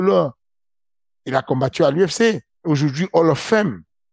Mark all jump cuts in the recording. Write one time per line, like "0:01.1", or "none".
0:02.5